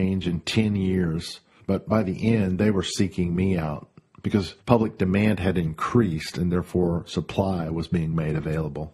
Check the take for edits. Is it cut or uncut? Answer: cut